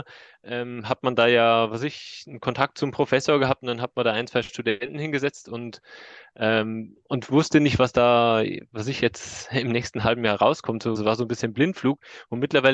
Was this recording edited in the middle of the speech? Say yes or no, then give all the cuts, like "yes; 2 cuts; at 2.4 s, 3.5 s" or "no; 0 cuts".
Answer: yes; 2 cuts; at 7.0 s, 10.9 s